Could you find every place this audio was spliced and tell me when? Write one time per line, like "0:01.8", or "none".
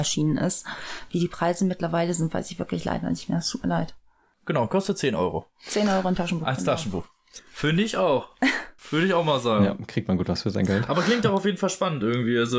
0:07.4
0:08.8

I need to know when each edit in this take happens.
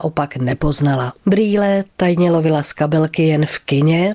0:01.2

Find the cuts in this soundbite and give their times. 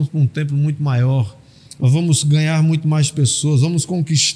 none

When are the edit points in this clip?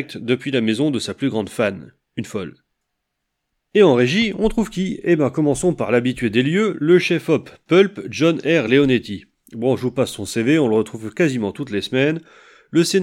none

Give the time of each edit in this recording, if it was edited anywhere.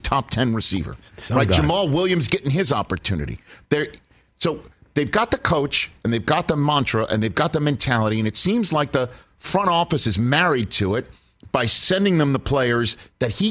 none

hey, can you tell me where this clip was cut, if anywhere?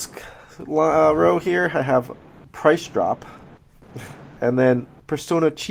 0:04.4

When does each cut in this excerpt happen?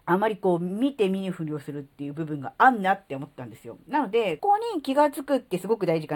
0:04.4

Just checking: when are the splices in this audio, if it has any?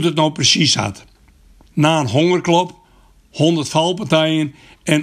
0:01.7

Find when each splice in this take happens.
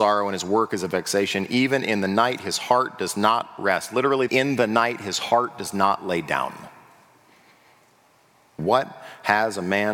0:04.3
0:08.6

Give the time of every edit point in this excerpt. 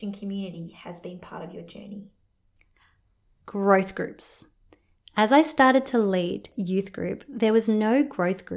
none

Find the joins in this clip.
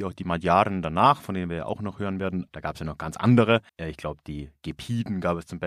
0:02.5
0:03.7

